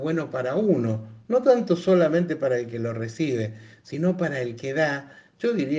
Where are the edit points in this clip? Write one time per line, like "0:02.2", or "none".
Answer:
none